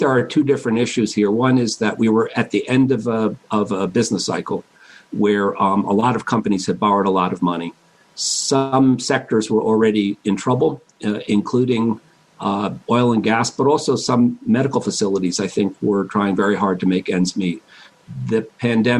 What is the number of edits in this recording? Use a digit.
0